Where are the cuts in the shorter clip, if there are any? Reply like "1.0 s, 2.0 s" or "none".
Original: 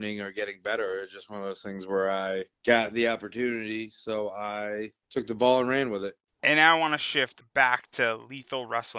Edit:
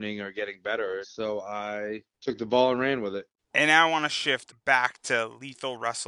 1.0 s